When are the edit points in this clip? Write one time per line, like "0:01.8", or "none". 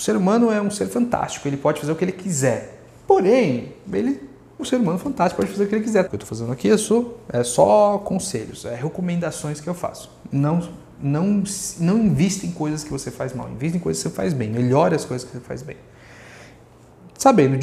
0:04.6
0:06.1